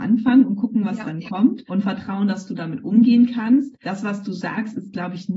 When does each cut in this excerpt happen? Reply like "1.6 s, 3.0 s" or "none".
none

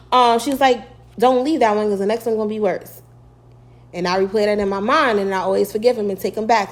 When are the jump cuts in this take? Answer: none

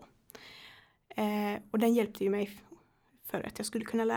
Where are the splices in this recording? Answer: none

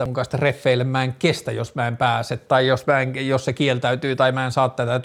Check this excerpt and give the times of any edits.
none

